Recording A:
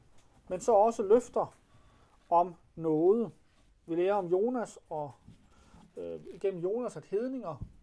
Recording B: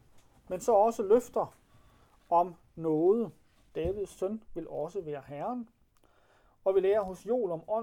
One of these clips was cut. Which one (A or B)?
B